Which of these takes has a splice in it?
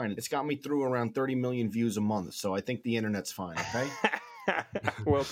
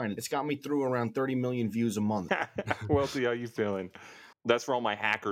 second; 2 cuts; at 2.3 s, 4.3 s

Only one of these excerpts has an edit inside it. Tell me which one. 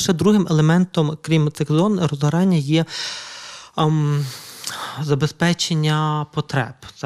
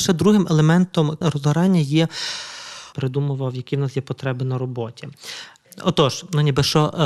second; 2 cuts; at 1.2 s, 2.9 s

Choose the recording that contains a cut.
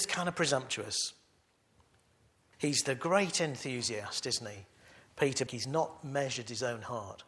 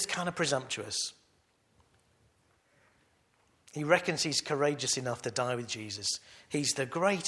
first; 2 cuts; at 2.5 s, 5.5 s

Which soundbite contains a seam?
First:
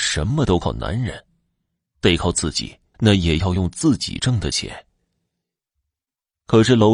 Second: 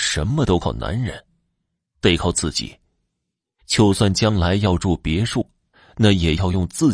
first; 1 cut; at 2.9 s

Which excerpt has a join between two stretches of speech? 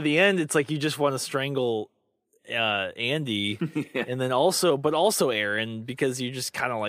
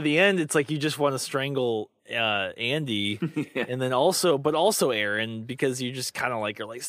second; 1 cut; at 2.0 s

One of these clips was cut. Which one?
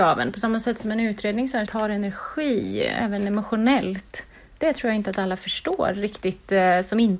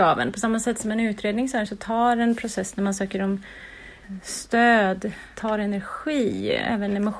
first; 1 cut; at 1.7 s

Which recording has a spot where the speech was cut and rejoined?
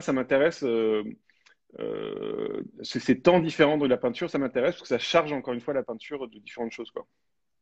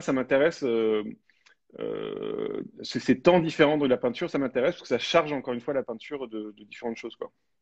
first; 1 cut; at 6.3 s

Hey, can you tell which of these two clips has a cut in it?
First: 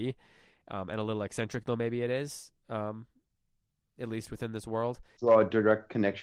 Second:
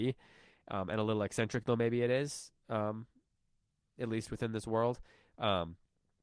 first; 1 cut; at 5.2 s

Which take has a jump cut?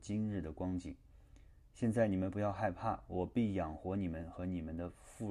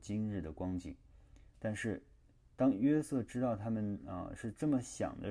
second; 1 cut; at 1.5 s

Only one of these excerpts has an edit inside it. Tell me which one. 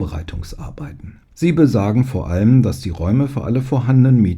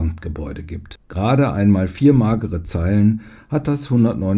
first; 1 cut; at 1.3 s

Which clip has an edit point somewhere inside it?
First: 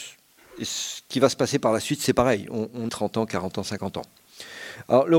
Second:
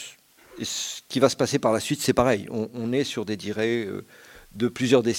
first; 1 cut; at 2.9 s

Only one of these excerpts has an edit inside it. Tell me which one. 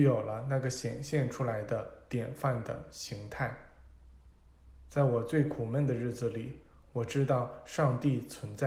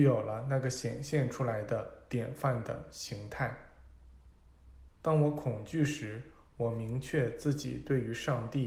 second; 1 cut; at 4.9 s

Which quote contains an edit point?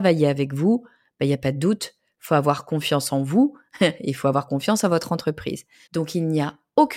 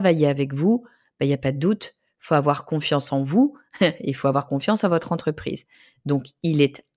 first; 1 cut; at 5.9 s

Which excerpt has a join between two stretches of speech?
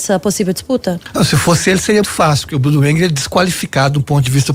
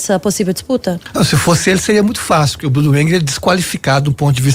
first; 1 cut; at 2.0 s

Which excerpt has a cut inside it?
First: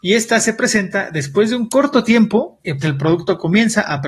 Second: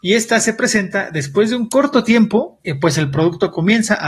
first; 1 cut; at 2.8 s

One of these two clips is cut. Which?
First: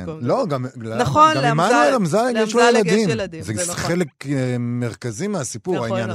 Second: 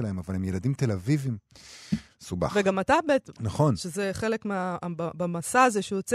second; 1 cut; at 3.3 s

